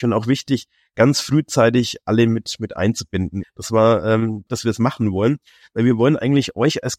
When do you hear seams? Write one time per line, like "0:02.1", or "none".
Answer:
0:03.4
0:04.5